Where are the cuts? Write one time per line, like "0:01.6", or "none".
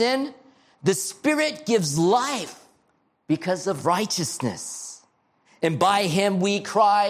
0:05.4